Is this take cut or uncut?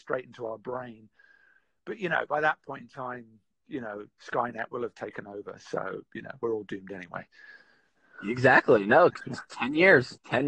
uncut